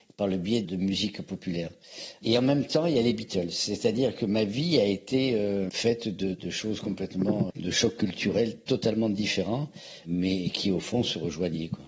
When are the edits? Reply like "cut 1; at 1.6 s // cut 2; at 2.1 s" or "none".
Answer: cut 1; at 6.3 s // cut 2; at 7.5 s